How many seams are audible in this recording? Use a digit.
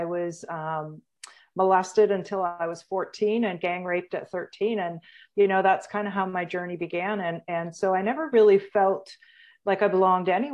0